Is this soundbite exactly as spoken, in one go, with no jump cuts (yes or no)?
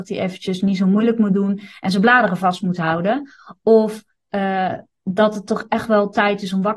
yes